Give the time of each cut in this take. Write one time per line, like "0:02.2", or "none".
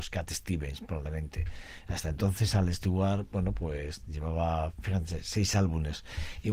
none